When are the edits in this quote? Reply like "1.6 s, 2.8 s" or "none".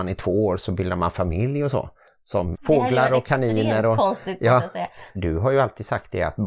2.5 s, 5.1 s